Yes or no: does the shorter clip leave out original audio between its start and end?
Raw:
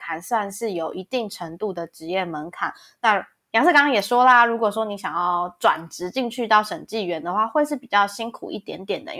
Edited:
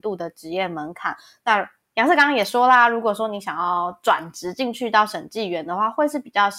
no